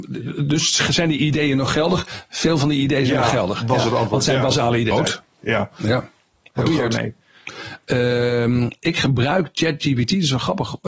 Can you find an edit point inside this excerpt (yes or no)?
yes